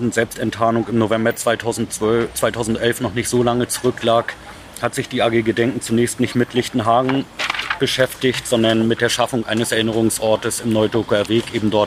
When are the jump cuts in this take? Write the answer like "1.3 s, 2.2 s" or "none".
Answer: none